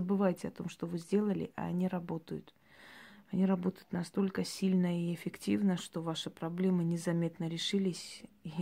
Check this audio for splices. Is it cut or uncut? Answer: cut